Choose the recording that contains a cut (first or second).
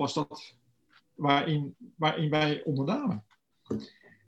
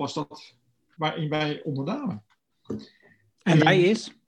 second